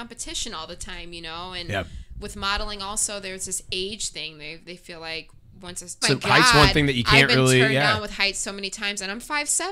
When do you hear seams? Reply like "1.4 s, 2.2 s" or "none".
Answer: 6.0 s